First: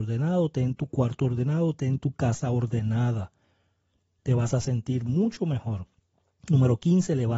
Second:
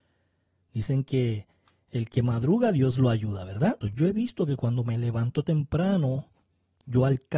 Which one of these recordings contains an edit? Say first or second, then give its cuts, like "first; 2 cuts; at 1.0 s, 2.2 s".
second; 1 cut; at 3.8 s